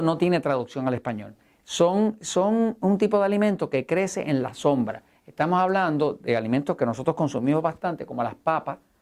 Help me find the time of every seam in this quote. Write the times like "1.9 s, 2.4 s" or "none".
1.6 s